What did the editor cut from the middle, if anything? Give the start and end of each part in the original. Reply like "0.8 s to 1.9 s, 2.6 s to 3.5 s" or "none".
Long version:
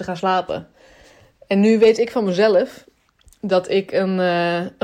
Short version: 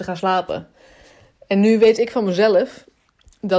none